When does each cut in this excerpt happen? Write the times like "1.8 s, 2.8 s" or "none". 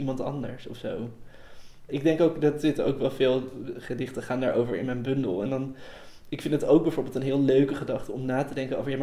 1.9 s